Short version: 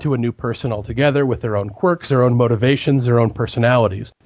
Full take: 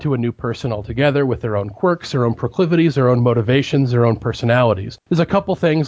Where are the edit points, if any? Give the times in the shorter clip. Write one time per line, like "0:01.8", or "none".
0:02.1